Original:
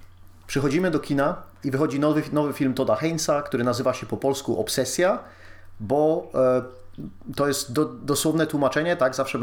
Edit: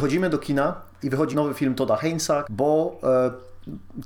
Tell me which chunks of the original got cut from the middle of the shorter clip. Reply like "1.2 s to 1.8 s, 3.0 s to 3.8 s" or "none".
1.9 s to 2.3 s, 3.4 s to 5.8 s